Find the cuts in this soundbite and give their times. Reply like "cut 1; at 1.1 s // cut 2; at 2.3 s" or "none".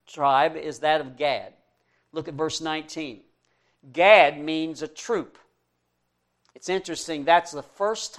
cut 1; at 6.5 s